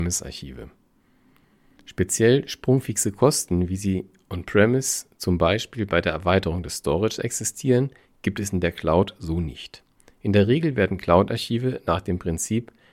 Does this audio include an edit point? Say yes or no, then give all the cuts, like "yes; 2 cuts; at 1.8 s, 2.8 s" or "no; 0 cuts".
no; 0 cuts